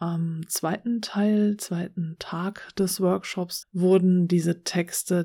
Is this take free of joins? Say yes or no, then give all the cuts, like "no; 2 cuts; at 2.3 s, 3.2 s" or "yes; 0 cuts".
no; 1 cut; at 3.6 s